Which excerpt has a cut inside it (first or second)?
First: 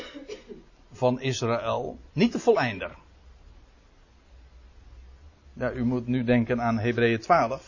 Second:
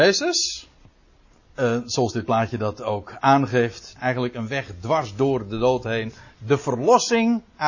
second